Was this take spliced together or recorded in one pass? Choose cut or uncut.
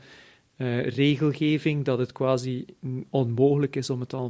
uncut